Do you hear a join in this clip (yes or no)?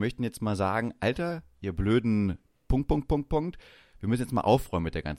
no